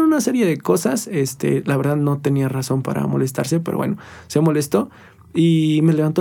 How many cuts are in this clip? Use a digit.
0